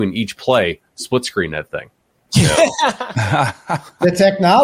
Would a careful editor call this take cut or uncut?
cut